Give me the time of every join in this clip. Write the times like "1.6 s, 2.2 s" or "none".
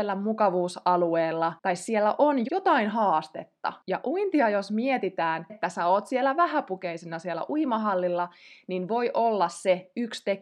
2.4 s, 5.5 s